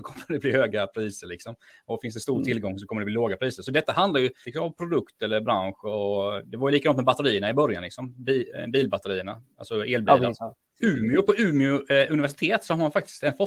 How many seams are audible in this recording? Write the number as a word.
two